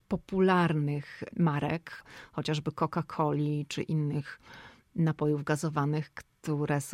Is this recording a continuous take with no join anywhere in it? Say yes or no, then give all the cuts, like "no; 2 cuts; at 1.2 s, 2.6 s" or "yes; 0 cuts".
yes; 0 cuts